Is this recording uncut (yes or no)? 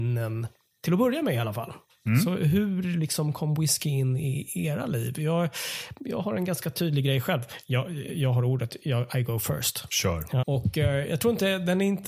no